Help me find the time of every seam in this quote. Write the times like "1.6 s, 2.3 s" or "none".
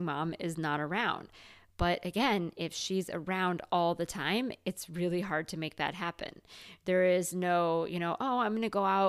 none